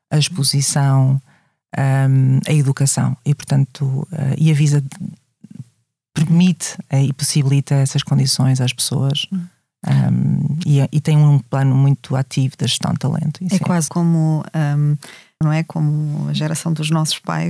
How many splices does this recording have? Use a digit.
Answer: 2